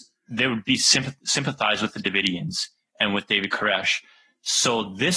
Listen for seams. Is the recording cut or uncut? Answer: uncut